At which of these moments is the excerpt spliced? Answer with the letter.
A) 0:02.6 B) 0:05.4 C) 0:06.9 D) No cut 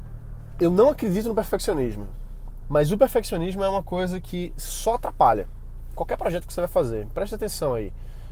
A